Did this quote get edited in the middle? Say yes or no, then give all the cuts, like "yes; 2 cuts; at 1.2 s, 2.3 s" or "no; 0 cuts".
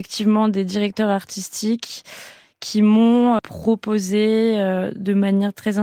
yes; 1 cut; at 3.4 s